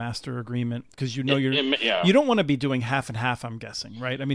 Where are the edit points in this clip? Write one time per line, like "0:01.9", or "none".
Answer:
none